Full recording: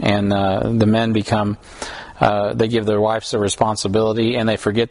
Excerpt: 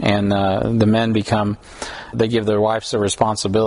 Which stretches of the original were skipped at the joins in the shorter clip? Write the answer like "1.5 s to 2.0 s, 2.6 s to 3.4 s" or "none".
2.1 s to 2.5 s